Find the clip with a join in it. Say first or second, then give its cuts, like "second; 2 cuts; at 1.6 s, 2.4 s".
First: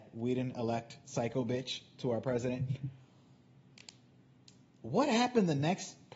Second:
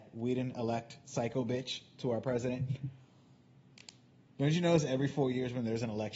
second; 1 cut; at 4.3 s